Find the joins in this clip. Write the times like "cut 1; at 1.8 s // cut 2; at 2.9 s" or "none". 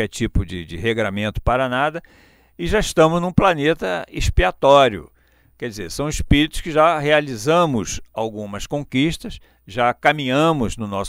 none